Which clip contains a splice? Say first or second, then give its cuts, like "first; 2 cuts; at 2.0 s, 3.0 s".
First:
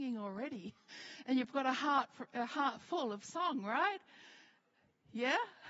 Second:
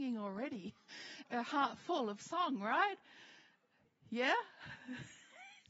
second; 1 cut; at 1.2 s